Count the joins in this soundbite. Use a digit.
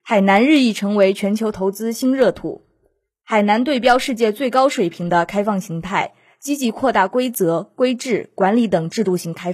0